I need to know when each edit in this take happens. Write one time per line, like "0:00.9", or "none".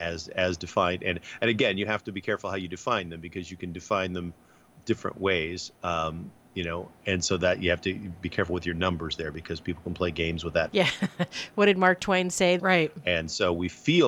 0:06.9
0:10.7
0:12.6